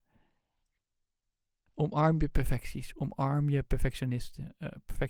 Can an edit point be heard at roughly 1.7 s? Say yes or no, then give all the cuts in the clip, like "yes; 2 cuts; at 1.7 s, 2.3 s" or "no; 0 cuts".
yes; 1 cut; at 1.7 s